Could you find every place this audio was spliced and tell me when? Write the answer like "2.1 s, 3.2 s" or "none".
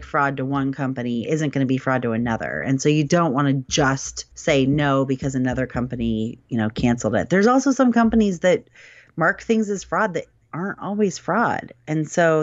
4.3 s